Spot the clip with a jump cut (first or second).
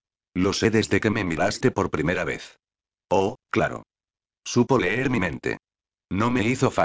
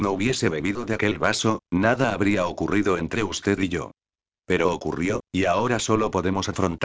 second